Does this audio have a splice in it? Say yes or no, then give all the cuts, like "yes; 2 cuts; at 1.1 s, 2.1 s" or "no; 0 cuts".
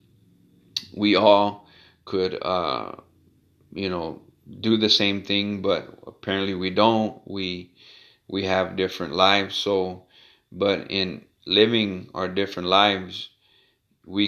no; 0 cuts